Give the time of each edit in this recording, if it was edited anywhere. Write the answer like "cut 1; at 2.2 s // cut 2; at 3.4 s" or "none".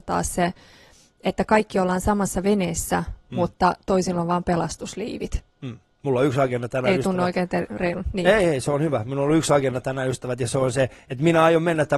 none